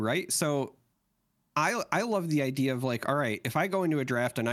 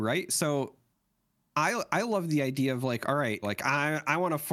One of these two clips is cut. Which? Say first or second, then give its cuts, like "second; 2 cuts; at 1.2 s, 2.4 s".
second; 1 cut; at 3.4 s